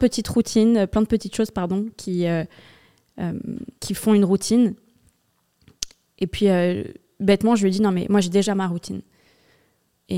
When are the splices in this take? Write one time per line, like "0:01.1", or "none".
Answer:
0:03.8